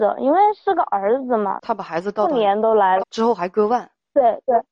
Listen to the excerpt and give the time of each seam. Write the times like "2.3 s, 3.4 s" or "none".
1.6 s, 3.0 s